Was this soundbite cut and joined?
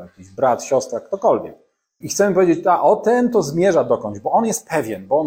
yes; 1 cut; at 2.0 s

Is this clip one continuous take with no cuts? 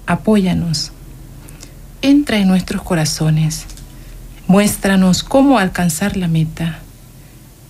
no; 1 cut; at 4.4 s

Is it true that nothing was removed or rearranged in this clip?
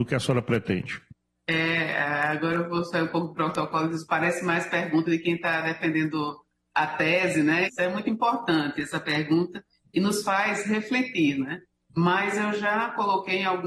no; 2 cuts; at 7.7 s, 11.9 s

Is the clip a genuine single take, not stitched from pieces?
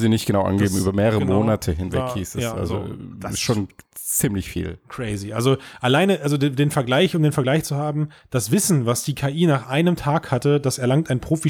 yes; 0 cuts

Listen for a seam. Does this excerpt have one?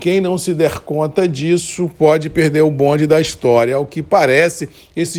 no; 0 cuts

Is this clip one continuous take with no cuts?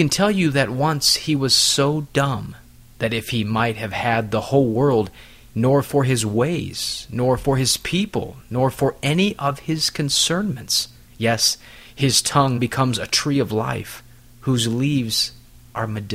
no; 3 cuts; at 5.5 s, 11.1 s, 12.6 s

